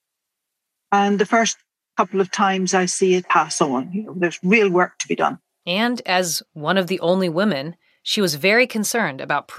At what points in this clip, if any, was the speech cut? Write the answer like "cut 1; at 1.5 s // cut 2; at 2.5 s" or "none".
cut 1; at 3.2 s

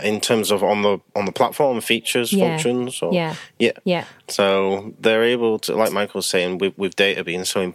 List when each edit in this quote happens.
cut 1; at 4.3 s

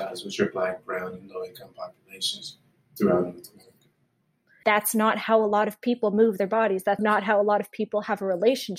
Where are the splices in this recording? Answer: cut 1; at 4.6 s // cut 2; at 7.0 s

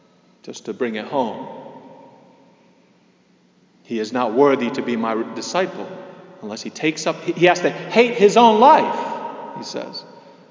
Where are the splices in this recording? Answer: none

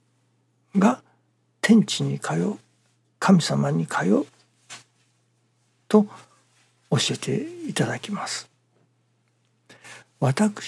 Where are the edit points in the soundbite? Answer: none

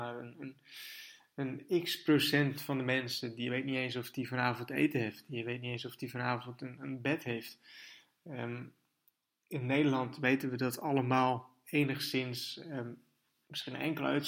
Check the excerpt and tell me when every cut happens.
none

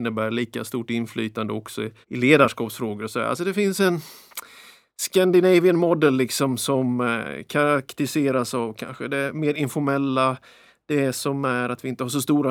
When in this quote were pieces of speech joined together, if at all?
cut 1; at 2.0 s

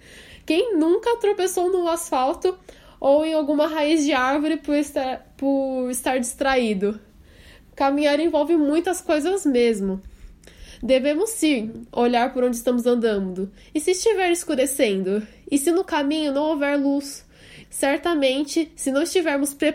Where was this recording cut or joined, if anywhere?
cut 1; at 17.6 s

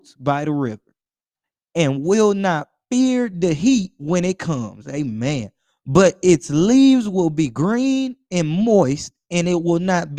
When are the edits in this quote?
none

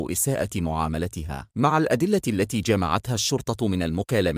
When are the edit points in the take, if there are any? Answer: cut 1; at 1.5 s

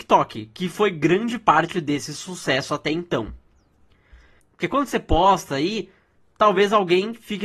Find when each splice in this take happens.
cut 1; at 4.4 s

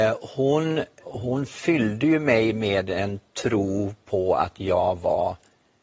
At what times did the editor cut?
cut 1; at 1.0 s

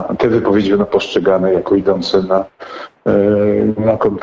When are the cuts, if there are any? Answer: none

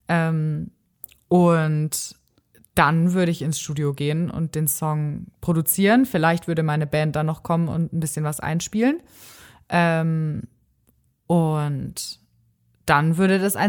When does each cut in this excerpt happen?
none

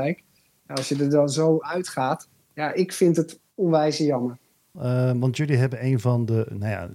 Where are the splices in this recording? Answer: cut 1; at 4.7 s

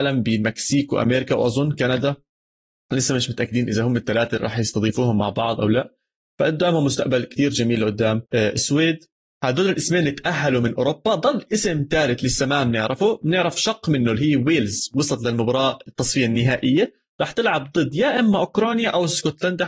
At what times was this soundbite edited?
cut 1; at 8.3 s

